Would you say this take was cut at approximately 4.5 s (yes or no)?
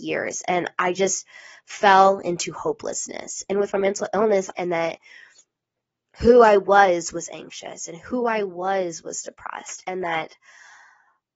yes